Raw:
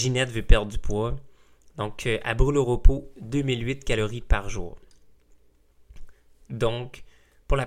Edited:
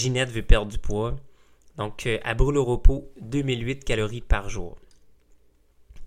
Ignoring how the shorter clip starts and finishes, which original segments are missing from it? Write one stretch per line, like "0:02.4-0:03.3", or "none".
none